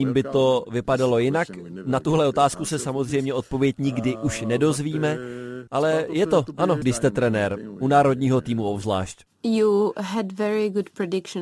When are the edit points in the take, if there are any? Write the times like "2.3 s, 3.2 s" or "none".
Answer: 5.7 s, 6.8 s